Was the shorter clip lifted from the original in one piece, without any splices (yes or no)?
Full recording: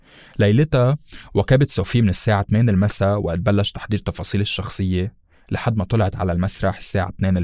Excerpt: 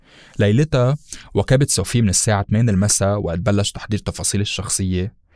yes